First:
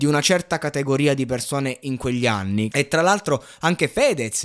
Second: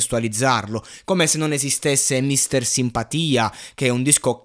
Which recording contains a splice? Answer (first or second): first